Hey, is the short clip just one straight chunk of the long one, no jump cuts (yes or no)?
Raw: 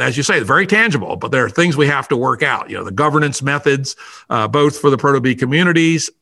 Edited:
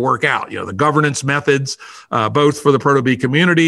yes